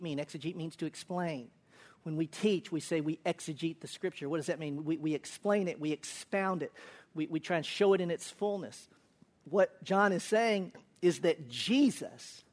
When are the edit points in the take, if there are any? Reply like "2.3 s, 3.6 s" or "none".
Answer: none